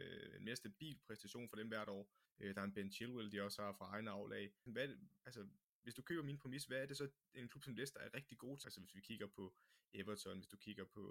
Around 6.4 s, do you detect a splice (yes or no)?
no